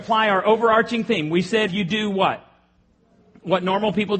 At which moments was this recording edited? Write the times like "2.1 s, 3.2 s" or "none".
1.7 s